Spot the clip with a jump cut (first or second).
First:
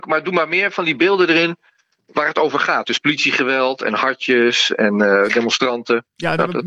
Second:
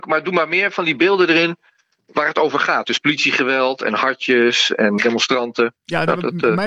second